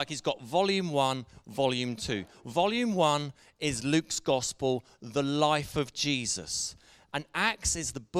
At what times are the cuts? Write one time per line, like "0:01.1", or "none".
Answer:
0:07.1